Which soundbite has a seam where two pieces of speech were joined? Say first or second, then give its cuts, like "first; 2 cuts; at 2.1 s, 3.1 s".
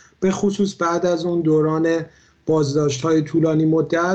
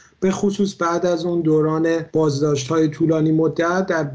second; 1 cut; at 2.1 s